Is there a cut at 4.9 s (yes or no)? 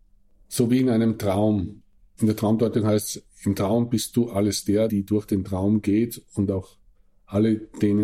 yes